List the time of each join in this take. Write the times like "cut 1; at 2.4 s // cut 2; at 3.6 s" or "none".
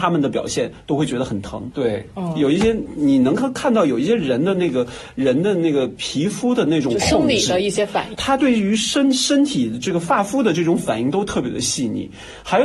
cut 1; at 1.7 s // cut 2; at 8.1 s